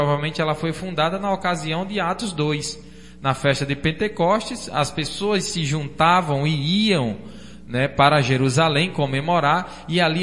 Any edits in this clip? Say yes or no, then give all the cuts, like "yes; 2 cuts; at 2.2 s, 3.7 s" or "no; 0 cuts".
no; 0 cuts